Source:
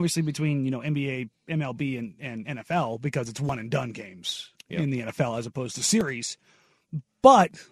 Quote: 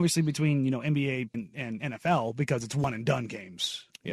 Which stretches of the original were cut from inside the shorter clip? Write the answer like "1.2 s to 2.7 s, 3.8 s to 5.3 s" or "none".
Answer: 1.3 s to 2.0 s